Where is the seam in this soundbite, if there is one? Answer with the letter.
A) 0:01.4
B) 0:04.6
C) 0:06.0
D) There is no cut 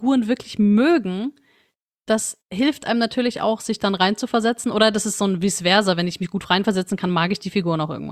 D